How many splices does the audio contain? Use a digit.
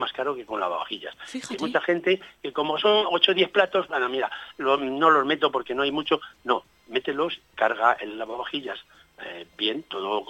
1